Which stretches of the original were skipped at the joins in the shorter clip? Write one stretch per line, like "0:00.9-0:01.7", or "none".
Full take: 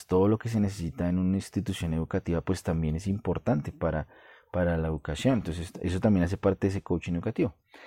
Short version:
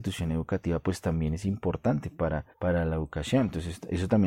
0:04.1-0:04.4

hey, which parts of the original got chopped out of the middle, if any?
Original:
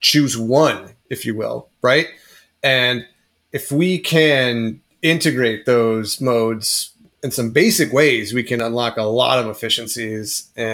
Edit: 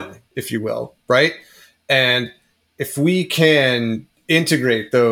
none

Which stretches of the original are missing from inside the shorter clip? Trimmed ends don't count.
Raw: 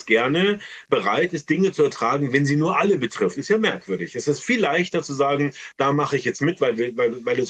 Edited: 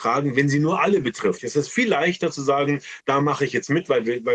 0:03.3-0:04.1

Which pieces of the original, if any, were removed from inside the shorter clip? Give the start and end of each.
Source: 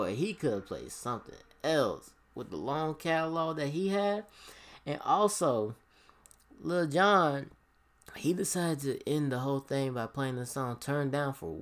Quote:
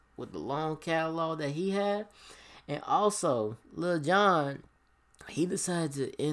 0:05.8-0:06.5

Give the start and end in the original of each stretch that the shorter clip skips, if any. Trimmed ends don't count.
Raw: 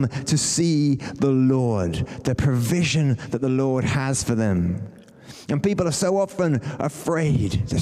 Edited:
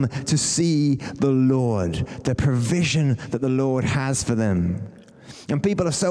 none

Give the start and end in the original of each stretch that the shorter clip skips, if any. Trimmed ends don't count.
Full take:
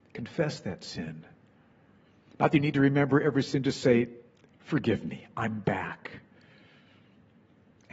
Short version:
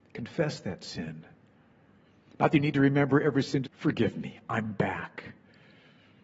0:03.6-0:04.5

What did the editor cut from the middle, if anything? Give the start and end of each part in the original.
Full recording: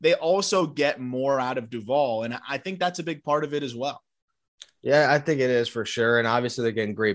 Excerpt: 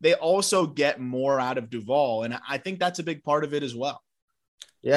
none

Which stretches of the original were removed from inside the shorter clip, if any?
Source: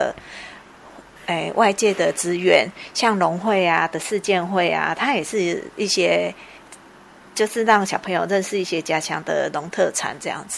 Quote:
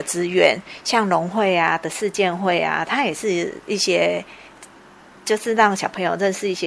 none

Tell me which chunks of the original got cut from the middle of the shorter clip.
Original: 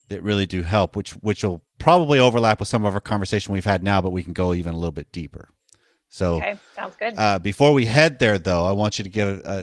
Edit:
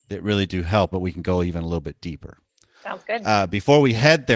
0:00.9-0:04.0
0:05.9-0:06.7

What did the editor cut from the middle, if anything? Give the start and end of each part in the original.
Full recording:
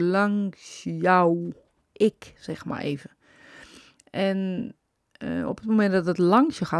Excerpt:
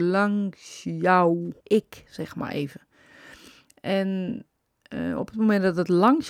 0:01.6-0:01.9

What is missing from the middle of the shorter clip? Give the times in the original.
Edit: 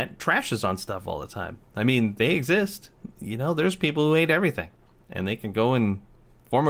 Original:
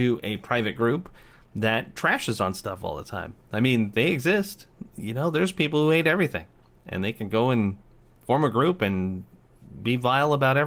none

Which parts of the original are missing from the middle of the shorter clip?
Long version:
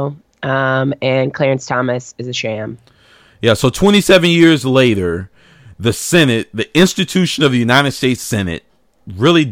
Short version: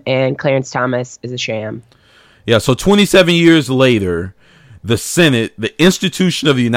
none

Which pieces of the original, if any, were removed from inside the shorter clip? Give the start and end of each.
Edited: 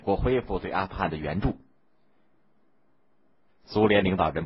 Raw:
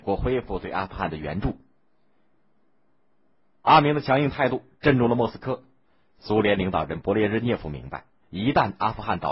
0:03.5-0:06.0

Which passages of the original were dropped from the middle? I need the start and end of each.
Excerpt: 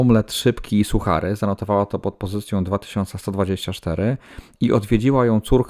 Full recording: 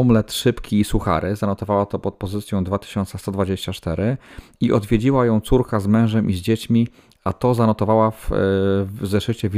none

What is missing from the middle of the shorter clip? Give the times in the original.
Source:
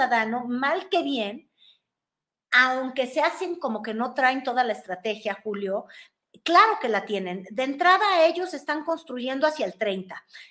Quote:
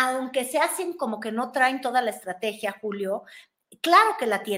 none

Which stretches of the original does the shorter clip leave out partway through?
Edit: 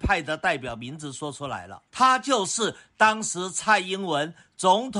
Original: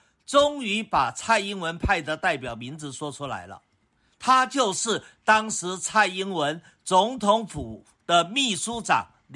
0:03.7-0:04.1

